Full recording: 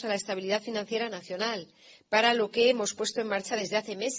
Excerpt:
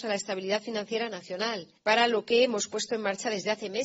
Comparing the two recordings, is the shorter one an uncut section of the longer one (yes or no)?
no